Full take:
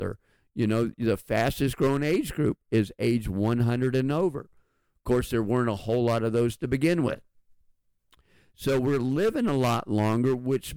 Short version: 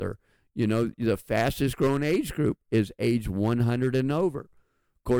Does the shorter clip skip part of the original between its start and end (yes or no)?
no